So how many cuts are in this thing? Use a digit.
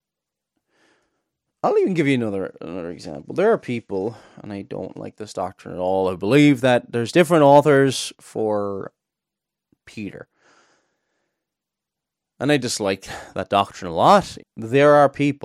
1